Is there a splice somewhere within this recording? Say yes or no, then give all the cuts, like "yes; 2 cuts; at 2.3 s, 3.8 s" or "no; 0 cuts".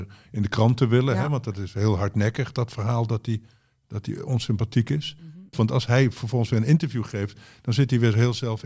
yes; 1 cut; at 5.5 s